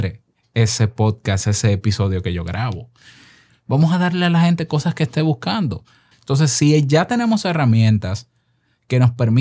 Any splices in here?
yes; 2 cuts; at 3.5 s, 6.1 s

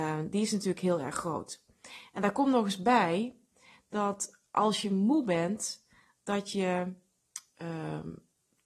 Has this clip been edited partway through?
no; 0 cuts

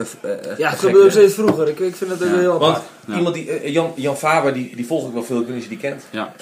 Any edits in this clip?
no; 0 cuts

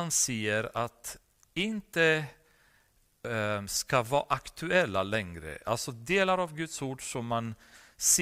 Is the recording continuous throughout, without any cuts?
yes; 0 cuts

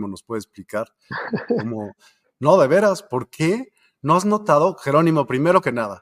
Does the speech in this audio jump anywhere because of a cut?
no; 0 cuts

